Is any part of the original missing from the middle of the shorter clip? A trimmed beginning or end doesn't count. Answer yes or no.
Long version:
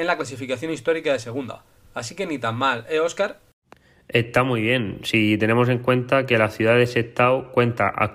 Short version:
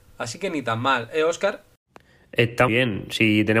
yes